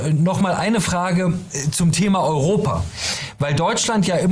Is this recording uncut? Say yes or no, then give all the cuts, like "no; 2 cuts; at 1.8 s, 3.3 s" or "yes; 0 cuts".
yes; 0 cuts